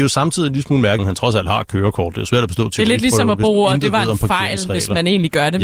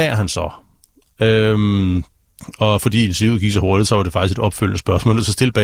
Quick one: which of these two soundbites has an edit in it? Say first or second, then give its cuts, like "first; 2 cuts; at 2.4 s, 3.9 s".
first; 1 cut; at 1.0 s